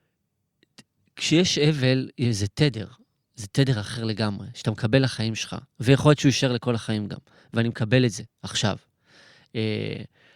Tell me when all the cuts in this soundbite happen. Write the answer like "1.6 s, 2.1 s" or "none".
none